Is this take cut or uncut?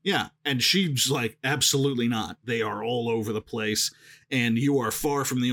uncut